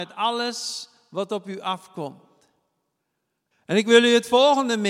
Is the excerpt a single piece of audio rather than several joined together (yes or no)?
no